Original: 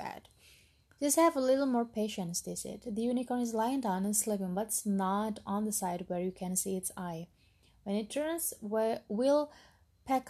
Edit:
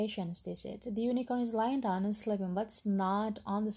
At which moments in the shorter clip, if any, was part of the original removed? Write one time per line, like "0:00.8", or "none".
none